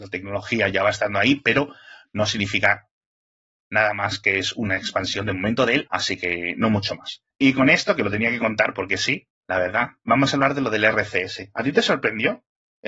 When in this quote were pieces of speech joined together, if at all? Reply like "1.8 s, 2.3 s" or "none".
5.9 s